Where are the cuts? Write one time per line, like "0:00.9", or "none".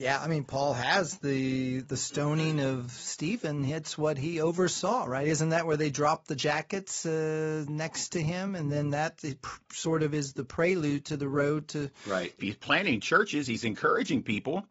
0:12.4